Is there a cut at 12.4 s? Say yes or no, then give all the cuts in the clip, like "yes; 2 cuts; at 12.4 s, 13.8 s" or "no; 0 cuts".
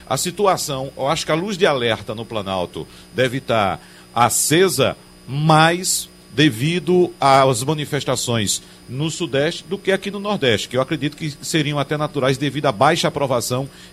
no; 0 cuts